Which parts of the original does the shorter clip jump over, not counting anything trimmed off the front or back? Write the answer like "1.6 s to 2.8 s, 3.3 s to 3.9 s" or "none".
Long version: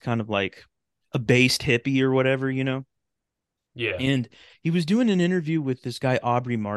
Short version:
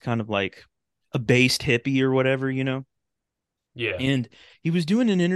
none